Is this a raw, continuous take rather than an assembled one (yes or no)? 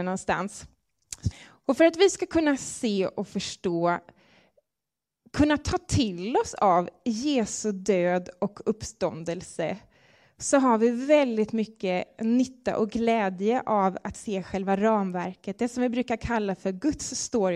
no